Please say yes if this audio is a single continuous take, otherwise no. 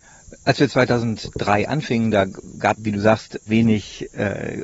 no